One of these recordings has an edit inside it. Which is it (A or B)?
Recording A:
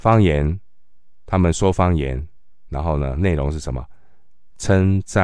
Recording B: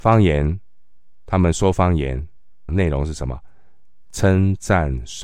B